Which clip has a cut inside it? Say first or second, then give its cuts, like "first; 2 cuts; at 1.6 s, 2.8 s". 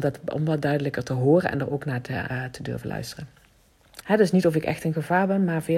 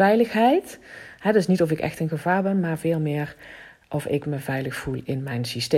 first; 2 cuts; at 2.3 s, 4.0 s